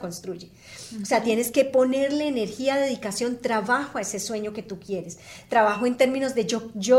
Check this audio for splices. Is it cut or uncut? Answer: uncut